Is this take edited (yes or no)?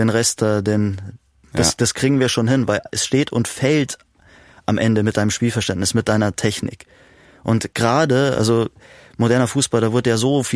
no